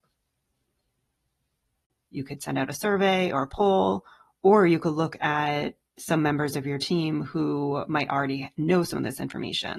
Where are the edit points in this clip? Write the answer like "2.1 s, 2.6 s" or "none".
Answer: 2.1 s